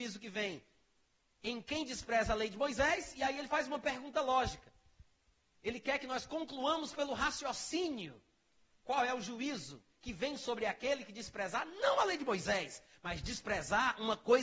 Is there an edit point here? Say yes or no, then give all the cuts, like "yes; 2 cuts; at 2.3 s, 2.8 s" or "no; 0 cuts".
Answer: no; 0 cuts